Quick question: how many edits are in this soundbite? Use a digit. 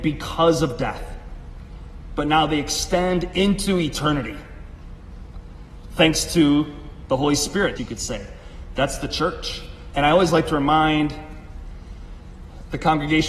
2